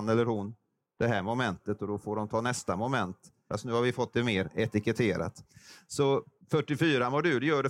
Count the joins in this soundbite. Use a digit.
1